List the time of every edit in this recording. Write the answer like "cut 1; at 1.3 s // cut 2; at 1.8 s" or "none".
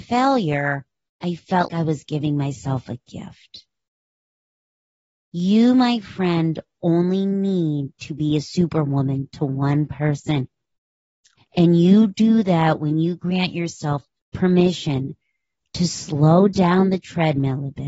cut 1; at 1.7 s // cut 2; at 11.4 s